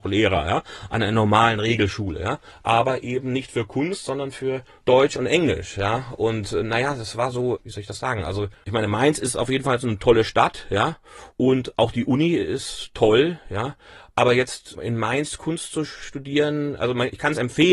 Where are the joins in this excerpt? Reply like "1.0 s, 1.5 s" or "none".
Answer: none